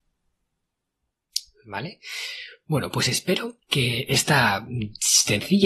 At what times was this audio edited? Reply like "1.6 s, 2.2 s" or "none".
3.6 s